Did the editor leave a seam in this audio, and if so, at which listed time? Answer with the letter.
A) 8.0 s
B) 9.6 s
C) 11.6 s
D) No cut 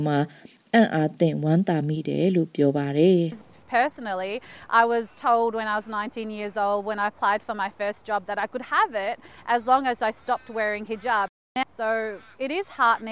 C